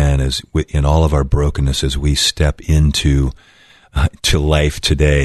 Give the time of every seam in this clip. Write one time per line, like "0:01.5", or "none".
none